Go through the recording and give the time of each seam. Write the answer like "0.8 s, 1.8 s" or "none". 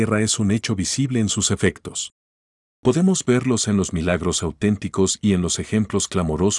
none

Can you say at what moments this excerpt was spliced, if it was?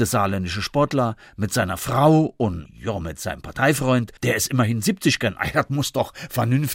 2.7 s, 4.2 s

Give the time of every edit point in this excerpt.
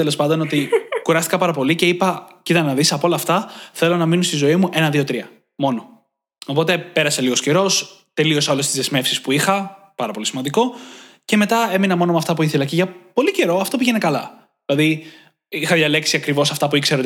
none

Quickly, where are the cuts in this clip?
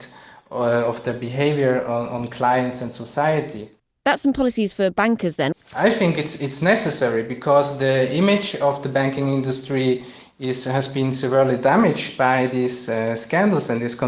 5.5 s

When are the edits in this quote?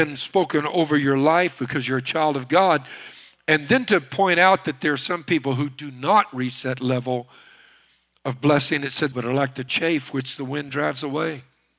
9.1 s

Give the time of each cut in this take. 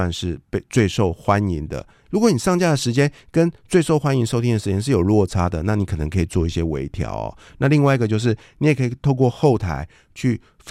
2.0 s

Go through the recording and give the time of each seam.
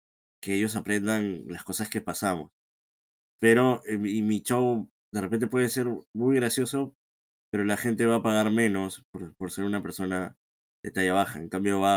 none

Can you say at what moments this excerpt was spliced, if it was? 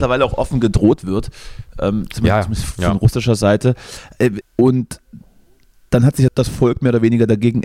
4.4 s, 6.3 s

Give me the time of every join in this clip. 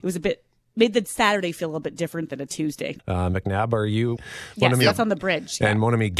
3.0 s, 4.2 s

